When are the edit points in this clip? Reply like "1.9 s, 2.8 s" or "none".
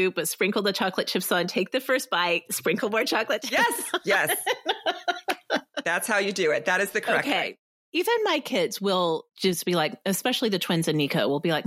9.3 s